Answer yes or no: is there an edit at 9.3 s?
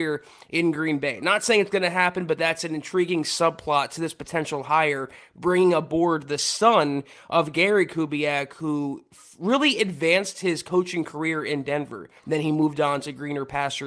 no